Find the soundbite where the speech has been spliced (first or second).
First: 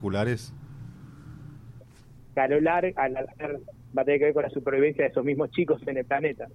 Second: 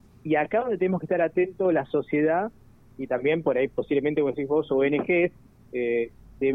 first